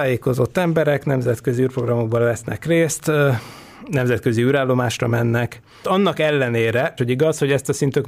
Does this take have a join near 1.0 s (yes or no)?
no